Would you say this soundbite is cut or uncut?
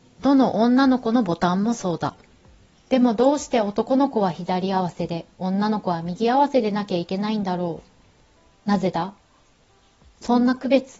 cut